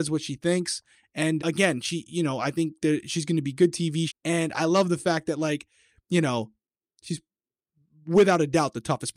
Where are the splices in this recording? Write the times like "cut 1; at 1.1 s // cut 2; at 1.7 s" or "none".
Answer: cut 1; at 1.4 s // cut 2; at 4.1 s